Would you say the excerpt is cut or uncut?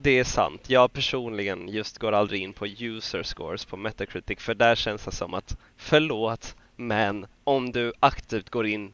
uncut